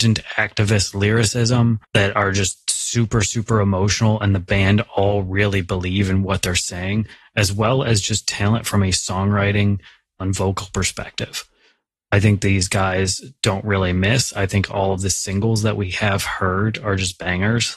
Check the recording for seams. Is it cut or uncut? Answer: cut